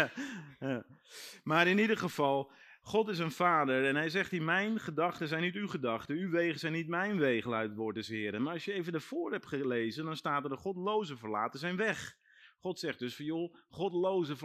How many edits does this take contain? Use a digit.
0